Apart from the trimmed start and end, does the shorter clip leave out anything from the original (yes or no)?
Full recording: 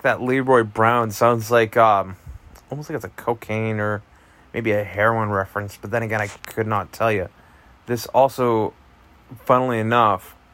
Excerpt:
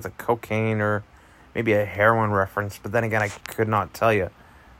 no